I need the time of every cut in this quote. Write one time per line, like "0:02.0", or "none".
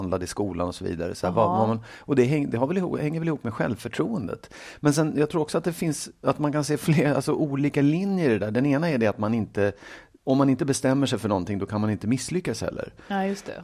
none